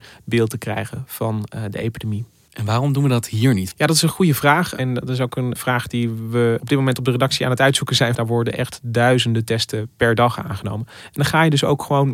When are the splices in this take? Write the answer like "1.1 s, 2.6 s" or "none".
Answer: 3.7 s, 8.1 s